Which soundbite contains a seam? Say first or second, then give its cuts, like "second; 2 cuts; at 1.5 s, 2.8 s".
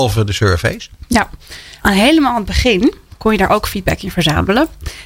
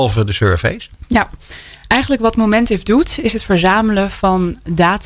first; 1 cut; at 1.8 s